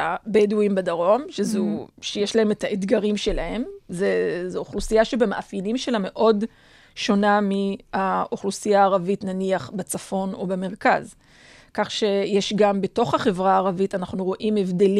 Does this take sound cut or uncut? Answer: uncut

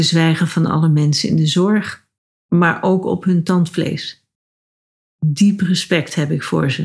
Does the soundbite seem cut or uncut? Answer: cut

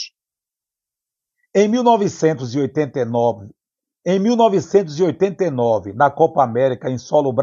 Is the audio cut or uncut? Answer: uncut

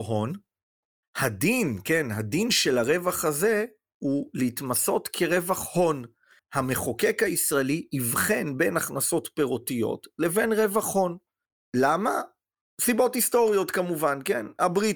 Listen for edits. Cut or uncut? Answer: uncut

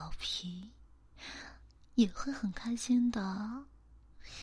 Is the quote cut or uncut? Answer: uncut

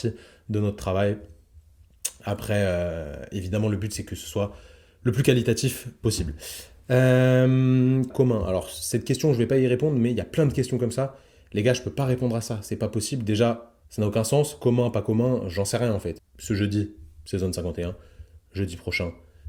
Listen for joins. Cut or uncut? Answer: cut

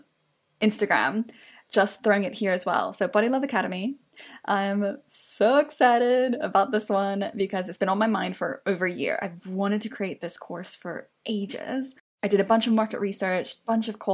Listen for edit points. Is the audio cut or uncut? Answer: uncut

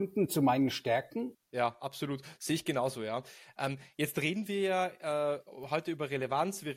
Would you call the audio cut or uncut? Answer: cut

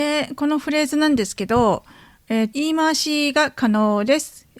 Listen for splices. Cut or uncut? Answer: cut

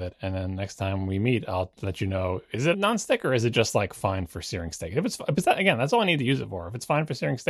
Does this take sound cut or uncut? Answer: cut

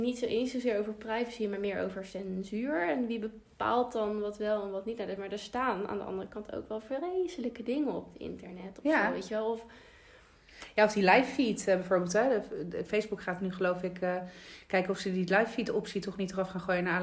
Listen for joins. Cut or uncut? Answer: uncut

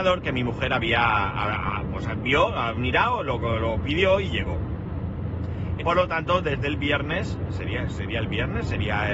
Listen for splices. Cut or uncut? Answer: cut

